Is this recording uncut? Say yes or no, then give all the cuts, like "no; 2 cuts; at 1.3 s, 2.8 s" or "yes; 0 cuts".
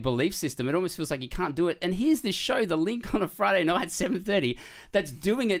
yes; 0 cuts